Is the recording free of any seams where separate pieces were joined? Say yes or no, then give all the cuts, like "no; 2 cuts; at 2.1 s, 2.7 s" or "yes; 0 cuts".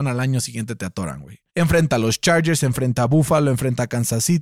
no; 1 cut; at 1.5 s